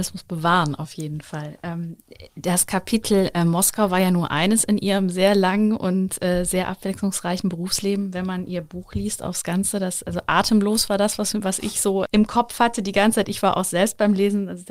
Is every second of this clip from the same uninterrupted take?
no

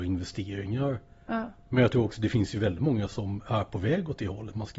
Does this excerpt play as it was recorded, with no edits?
no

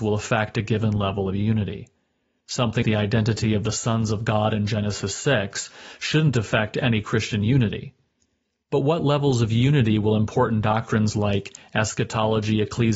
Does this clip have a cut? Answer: yes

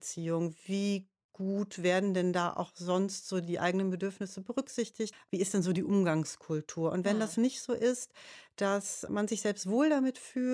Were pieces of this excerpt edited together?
yes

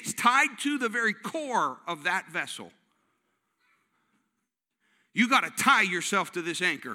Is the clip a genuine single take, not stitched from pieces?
yes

